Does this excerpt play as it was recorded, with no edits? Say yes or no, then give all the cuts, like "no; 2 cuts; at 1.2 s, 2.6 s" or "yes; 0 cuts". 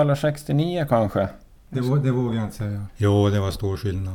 no; 2 cuts; at 1.5 s, 2.9 s